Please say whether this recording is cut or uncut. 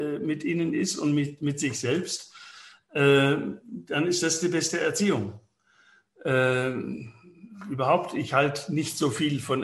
uncut